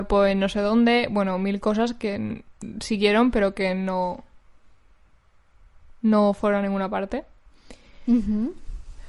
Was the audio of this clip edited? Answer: no; 0 cuts

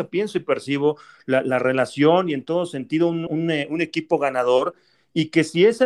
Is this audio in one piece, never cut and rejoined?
no; 1 cut; at 3.3 s

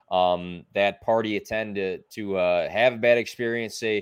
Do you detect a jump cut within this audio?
no; 0 cuts

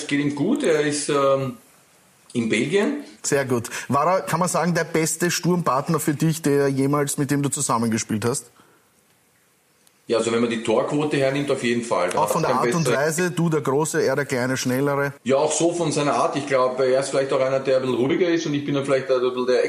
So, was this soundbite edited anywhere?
yes; 1 cut; at 15.2 s

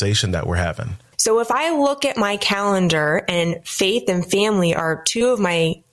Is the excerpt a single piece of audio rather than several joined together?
no; 1 cut; at 1.1 s

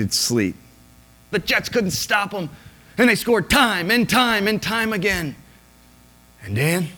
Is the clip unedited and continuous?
no; 1 cut; at 1.3 s

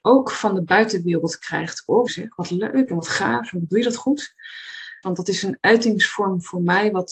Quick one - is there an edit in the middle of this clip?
yes; 2 cuts; at 2.1 s, 5.0 s

